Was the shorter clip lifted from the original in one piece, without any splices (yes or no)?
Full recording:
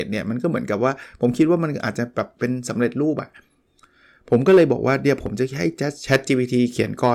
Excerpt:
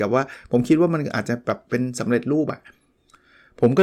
yes